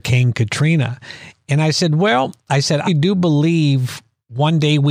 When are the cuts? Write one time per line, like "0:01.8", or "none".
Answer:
0:01.4
0:02.9